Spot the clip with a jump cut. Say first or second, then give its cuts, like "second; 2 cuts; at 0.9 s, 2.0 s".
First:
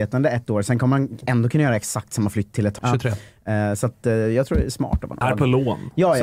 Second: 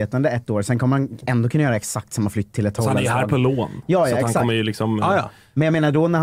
first; 2 cuts; at 2.8 s, 5.2 s